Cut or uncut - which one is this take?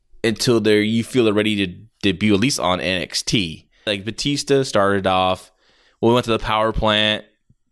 cut